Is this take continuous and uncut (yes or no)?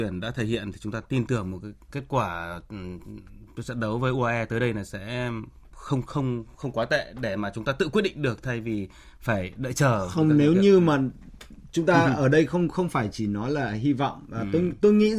yes